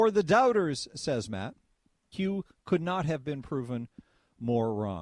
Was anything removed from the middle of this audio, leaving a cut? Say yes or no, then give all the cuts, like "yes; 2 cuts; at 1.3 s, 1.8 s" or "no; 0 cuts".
yes; 1 cut; at 2.1 s